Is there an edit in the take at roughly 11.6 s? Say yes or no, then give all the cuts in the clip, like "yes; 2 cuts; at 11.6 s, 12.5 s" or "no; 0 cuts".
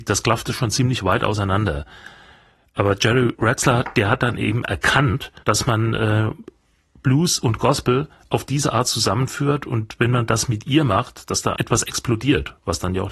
yes; 2 cuts; at 5.4 s, 11.6 s